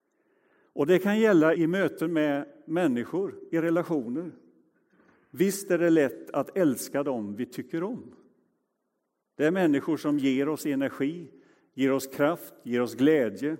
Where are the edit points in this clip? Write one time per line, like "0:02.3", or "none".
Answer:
0:01.6